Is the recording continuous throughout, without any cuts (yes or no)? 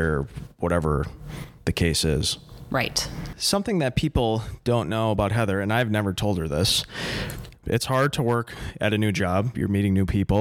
no